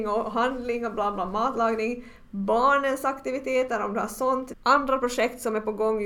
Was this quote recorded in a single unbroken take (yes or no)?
no